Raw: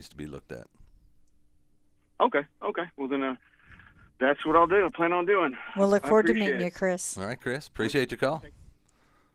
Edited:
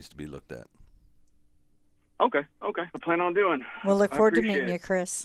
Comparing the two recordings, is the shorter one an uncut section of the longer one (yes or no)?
no